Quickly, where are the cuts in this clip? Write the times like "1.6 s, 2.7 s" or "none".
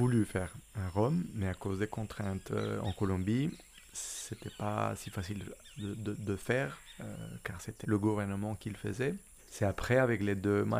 7.8 s, 9.4 s